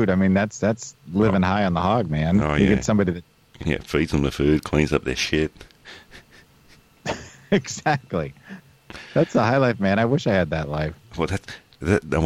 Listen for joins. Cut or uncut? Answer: cut